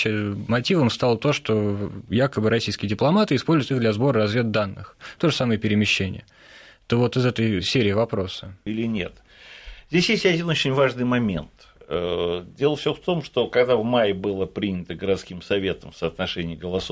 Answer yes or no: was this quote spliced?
yes